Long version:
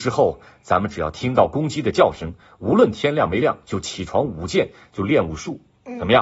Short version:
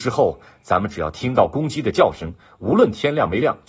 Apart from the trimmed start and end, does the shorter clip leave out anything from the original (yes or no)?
no